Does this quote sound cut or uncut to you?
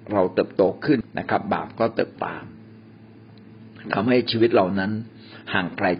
cut